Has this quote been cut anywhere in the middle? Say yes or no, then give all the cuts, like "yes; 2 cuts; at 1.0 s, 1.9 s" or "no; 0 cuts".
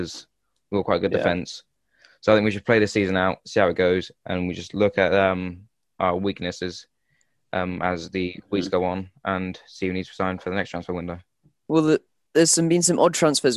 no; 0 cuts